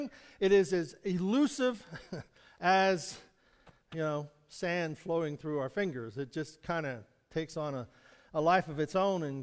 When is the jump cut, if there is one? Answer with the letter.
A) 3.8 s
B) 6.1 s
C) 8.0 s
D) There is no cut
D